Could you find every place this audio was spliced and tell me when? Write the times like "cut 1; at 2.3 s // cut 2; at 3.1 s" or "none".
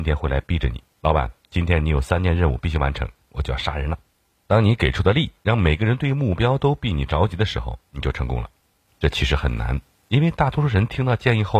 cut 1; at 0.9 s // cut 2; at 3.3 s // cut 3; at 8.9 s